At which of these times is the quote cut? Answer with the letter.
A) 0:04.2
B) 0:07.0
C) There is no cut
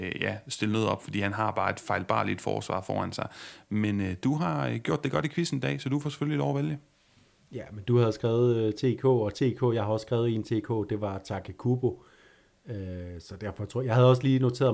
C